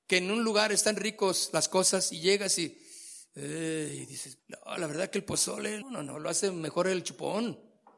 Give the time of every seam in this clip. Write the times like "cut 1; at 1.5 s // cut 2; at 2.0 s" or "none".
cut 1; at 4.4 s // cut 2; at 5.8 s